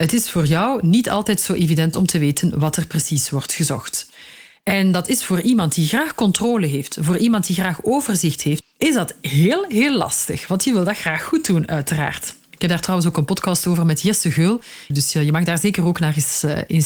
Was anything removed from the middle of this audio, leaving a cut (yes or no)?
yes